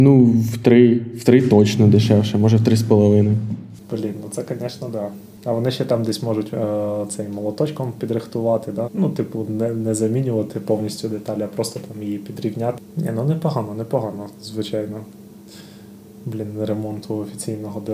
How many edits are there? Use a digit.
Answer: 1